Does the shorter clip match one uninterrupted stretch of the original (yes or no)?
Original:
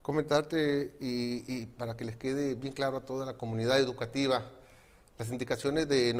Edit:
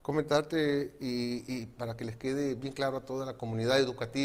yes